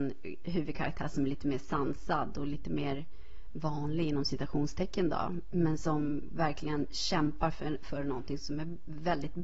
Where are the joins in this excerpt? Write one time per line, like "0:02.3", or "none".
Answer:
none